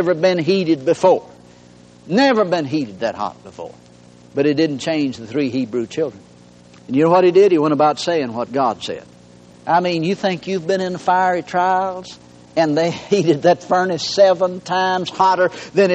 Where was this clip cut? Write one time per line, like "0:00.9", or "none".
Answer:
0:06.8
0:09.5